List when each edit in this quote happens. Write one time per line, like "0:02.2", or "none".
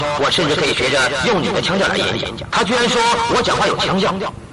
0:02.5